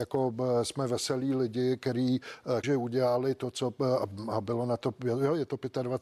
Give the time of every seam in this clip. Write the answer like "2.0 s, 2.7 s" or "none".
2.6 s